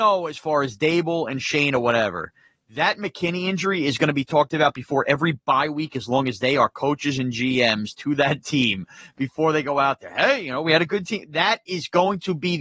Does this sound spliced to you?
no; 0 cuts

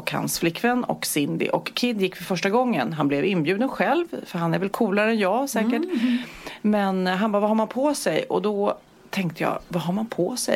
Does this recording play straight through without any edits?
yes; 0 cuts

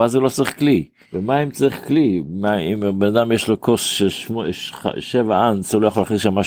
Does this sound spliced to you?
yes; 1 cut; at 1.0 s

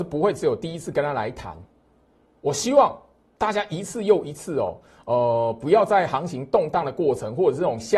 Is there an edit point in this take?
no; 0 cuts

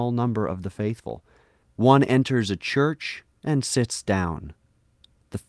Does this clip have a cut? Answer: yes; 1 cut; at 1.6 s

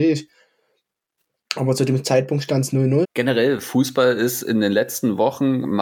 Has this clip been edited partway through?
yes; 1 cut; at 3.0 s

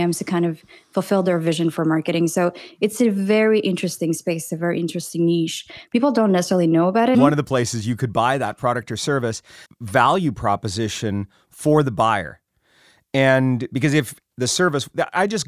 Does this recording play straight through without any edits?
no; 3 cuts; at 7.1 s, 9.7 s, 14.2 s

